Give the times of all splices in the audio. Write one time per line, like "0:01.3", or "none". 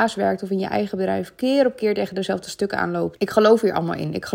0:03.2